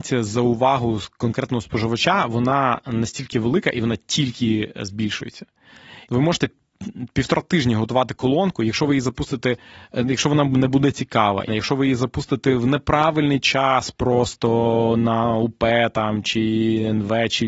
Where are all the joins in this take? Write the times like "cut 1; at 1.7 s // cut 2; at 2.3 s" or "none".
cut 1; at 6.1 s // cut 2; at 11.5 s

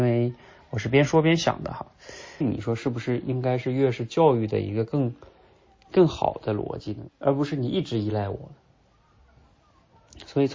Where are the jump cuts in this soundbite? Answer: cut 1; at 2.4 s // cut 2; at 7.1 s

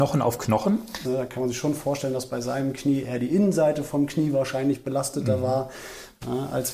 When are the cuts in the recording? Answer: cut 1; at 1.0 s

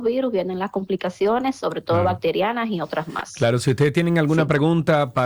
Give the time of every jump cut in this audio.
none

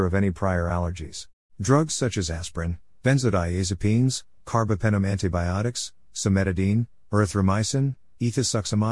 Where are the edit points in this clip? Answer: cut 1; at 1.4 s

